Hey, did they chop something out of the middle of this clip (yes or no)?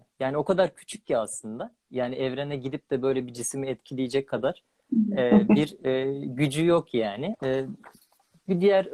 yes